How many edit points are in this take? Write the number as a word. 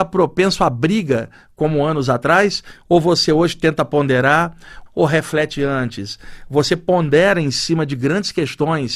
one